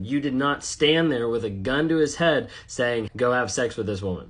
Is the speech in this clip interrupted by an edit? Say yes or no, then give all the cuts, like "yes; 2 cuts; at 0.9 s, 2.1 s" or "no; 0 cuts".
yes; 1 cut; at 3.1 s